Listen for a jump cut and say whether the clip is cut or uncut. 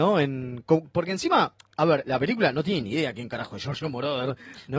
cut